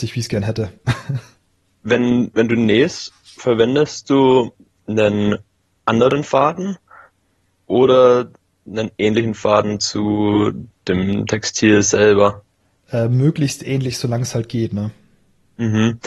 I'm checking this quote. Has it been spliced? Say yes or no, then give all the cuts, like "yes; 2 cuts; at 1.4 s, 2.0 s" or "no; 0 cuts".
no; 0 cuts